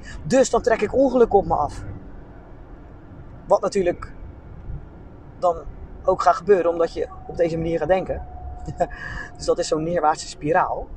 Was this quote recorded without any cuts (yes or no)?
yes